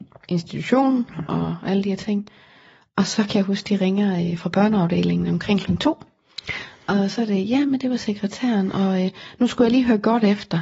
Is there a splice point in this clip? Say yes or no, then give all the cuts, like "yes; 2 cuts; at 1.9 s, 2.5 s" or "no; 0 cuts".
no; 0 cuts